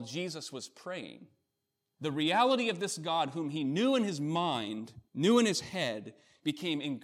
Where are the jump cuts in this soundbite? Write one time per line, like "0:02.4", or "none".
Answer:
0:02.0
0:05.1